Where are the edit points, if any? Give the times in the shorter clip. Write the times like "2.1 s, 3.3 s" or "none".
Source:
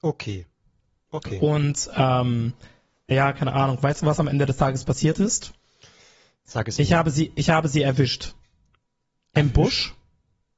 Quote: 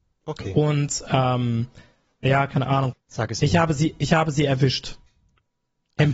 2.9 s